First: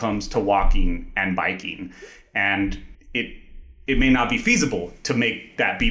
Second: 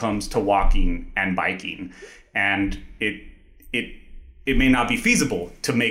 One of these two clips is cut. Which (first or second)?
first